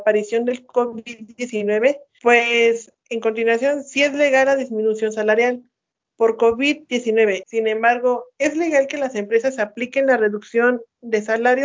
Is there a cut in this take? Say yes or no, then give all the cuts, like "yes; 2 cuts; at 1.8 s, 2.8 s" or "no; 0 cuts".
yes; 2 cuts; at 3.0 s, 7.4 s